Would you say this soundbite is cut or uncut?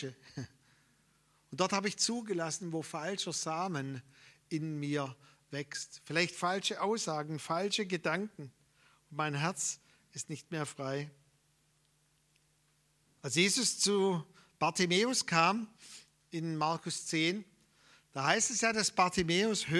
uncut